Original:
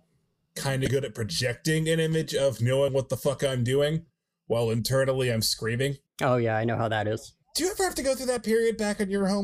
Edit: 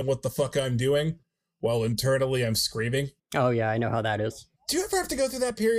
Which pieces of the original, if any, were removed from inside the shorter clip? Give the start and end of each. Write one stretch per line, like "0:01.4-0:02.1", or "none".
none